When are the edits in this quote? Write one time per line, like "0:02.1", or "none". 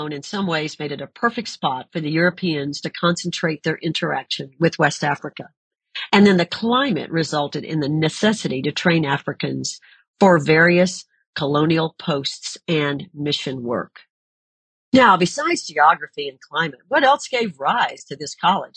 none